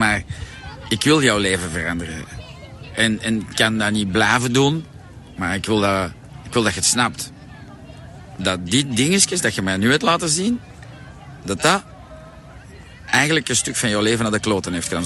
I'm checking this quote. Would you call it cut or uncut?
uncut